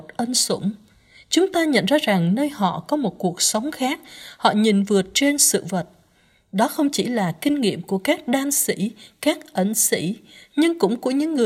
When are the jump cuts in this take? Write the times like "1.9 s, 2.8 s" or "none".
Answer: none